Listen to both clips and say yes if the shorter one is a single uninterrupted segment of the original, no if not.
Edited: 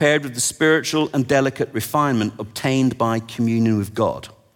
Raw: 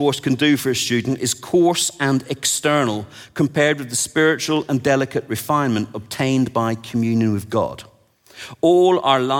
yes